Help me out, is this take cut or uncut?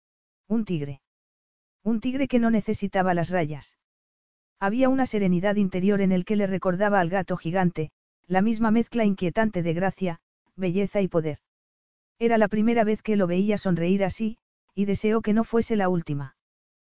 cut